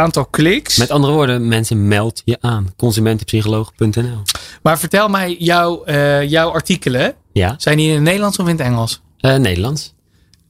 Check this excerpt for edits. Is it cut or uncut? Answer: uncut